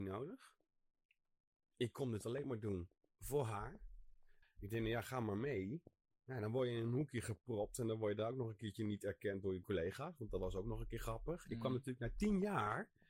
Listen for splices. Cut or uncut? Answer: cut